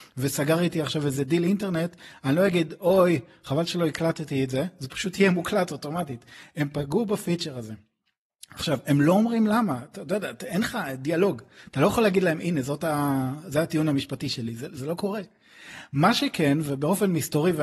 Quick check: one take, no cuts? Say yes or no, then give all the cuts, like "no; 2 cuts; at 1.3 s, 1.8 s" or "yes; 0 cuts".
yes; 0 cuts